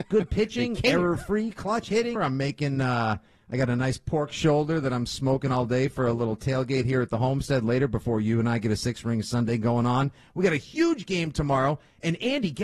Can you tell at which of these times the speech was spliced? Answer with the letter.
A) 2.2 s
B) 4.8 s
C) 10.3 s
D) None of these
A